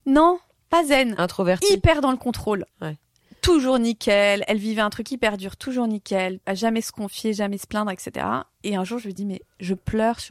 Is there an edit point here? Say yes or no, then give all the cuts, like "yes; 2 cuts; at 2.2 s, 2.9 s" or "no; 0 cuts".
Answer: yes; 2 cuts; at 6.4 s, 9.2 s